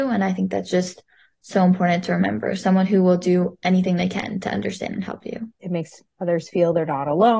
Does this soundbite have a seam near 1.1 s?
no; 1 cut; at 5.6 s

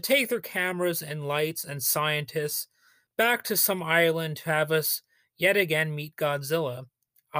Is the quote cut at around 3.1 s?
yes; 1 cut; at 3.1 s

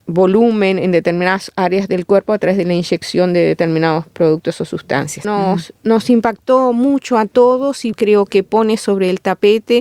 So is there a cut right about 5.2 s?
yes; 2 cuts; at 5.2 s, 7.9 s

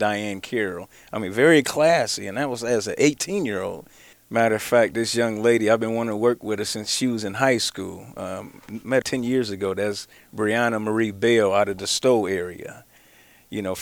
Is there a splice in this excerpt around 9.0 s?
yes; 2 cuts; at 4.1 s, 9.0 s

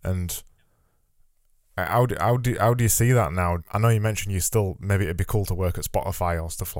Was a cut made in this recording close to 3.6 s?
yes; 1 cut; at 3.6 s

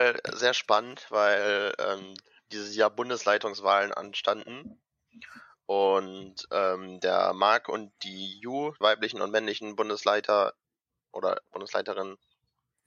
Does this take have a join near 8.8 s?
yes; 1 cut; at 8.8 s

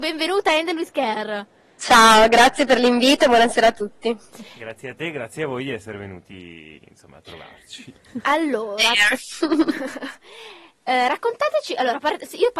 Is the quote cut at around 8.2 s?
no; 0 cuts

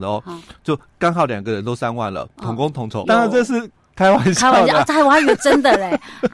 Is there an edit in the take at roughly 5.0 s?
no; 1 cut; at 3.0 s

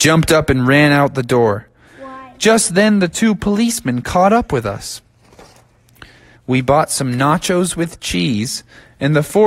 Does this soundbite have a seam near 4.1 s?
no; 2 cuts; at 1.9 s, 6.4 s

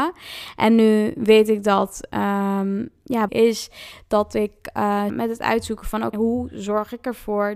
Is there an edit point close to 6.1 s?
yes; 3 cuts; at 3.3 s, 5.1 s, 6.1 s

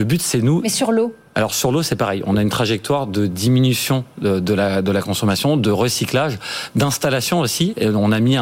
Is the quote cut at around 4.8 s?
no; 1 cut; at 1.2 s

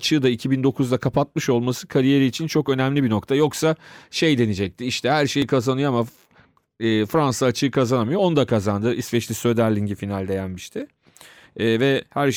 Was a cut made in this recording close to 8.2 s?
no; 0 cuts

